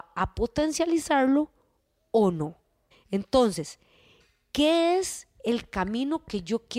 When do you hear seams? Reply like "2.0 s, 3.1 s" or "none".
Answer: 2.9 s